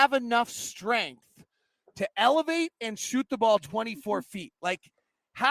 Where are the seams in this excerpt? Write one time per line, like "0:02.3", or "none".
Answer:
none